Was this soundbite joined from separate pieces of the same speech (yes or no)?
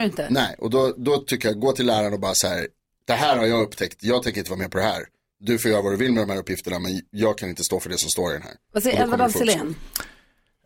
no